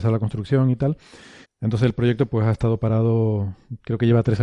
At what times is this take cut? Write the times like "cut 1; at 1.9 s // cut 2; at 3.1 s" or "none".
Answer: cut 1; at 1.4 s